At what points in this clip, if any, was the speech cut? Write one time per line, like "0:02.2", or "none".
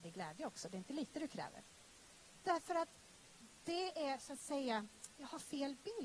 none